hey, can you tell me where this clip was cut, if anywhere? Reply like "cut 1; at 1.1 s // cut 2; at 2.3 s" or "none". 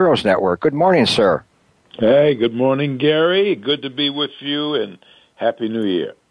none